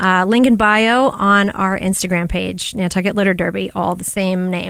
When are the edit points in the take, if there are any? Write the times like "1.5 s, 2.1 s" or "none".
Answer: none